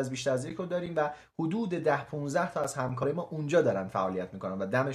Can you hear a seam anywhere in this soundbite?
no; 0 cuts

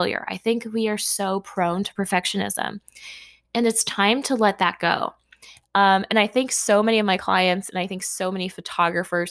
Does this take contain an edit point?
yes; 1 cut; at 5.6 s

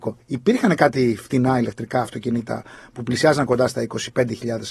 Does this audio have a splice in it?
no; 0 cuts

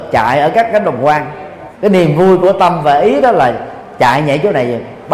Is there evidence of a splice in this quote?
yes; 1 cut; at 1.7 s

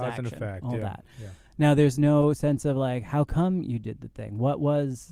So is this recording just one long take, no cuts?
yes; 0 cuts

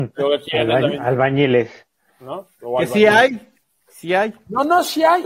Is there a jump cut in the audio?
no; 0 cuts

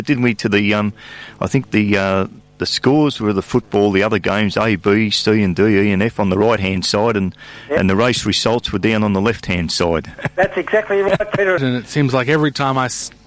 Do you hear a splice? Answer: yes; 2 cuts; at 10.1 s, 11.6 s

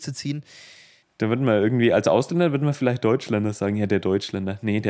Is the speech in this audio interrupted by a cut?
yes; 1 cut; at 1.0 s

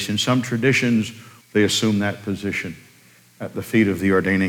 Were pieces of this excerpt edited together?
yes; 1 cut; at 1.4 s

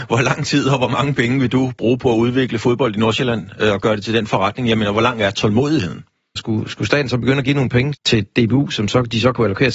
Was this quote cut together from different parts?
yes; 2 cuts; at 6.4 s, 7.9 s

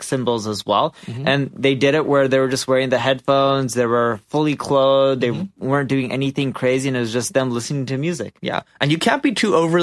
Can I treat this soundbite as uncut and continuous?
yes; 0 cuts

